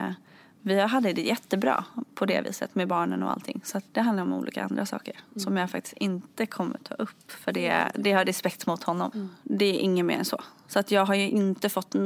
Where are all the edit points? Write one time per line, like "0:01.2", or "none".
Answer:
0:03.9
0:09.1